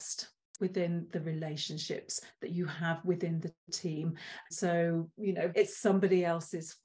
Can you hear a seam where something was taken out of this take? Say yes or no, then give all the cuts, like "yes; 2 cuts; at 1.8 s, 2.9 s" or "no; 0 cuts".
yes; 2 cuts; at 4.5 s, 5.5 s